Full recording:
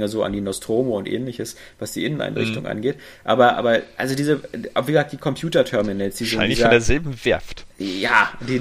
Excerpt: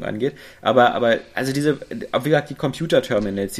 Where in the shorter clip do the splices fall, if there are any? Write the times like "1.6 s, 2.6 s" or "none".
none